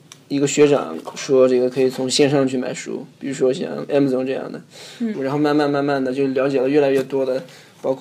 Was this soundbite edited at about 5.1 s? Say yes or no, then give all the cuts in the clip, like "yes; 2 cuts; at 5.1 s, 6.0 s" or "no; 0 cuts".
yes; 1 cut; at 5.1 s